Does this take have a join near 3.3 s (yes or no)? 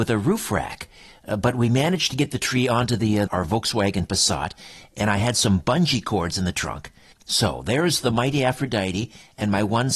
yes